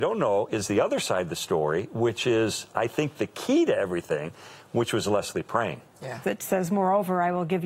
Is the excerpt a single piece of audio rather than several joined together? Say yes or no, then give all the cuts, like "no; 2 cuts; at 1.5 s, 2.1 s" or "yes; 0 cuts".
no; 1 cut; at 6.2 s